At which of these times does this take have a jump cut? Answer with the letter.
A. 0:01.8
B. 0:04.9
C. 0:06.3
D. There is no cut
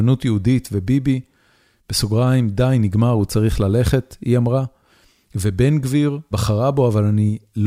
C